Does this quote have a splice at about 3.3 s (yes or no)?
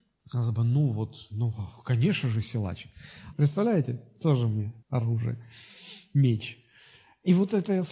yes